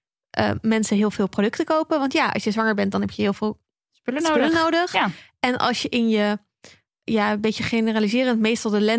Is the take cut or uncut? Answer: uncut